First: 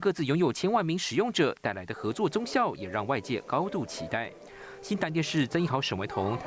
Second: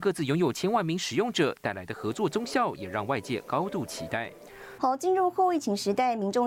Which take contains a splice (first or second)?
second